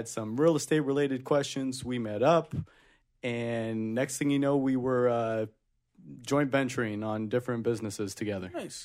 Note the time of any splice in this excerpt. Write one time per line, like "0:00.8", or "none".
none